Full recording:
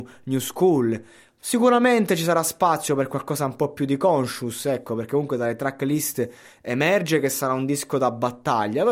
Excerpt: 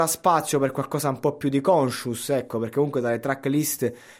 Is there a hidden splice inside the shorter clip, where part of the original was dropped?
no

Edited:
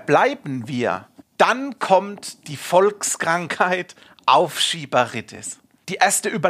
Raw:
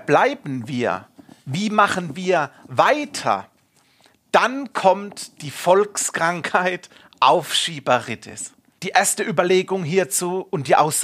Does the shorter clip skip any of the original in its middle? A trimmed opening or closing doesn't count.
yes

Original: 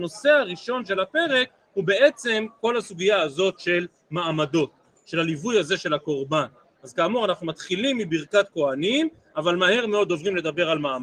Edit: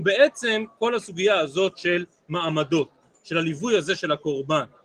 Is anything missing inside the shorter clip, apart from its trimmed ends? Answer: no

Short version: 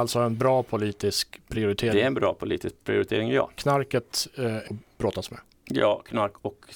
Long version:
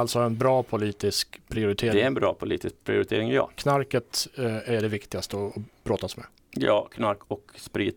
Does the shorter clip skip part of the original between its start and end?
yes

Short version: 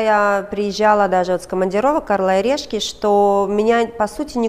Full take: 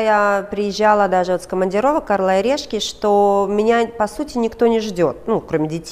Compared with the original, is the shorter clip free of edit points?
yes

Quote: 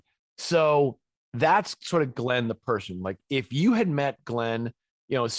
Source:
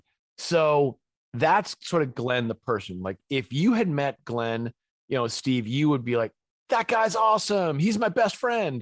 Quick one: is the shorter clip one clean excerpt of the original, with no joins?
yes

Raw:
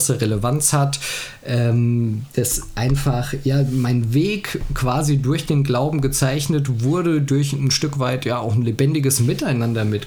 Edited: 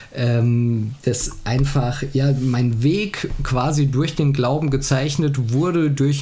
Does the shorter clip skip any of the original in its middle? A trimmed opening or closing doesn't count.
no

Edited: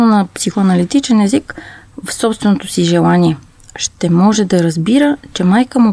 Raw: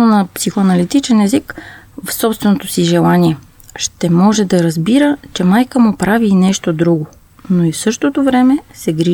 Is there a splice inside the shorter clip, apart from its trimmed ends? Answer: no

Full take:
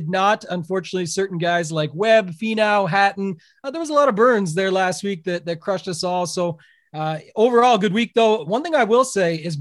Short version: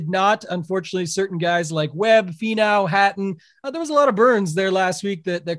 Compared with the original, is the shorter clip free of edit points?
yes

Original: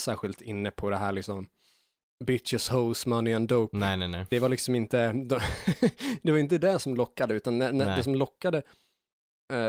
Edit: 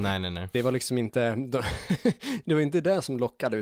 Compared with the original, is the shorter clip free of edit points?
yes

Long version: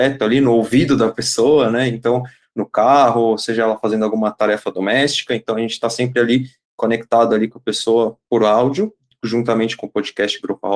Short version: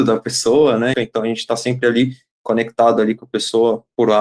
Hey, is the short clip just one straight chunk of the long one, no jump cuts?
no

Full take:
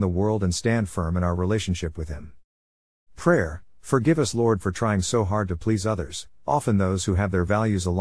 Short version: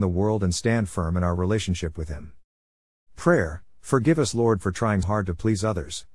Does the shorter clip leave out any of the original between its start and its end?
yes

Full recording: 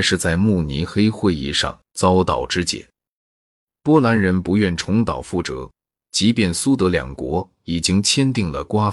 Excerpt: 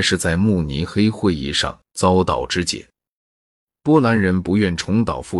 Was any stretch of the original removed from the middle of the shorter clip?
no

